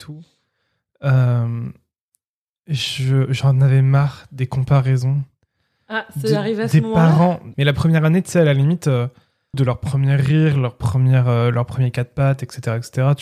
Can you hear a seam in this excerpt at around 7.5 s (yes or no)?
yes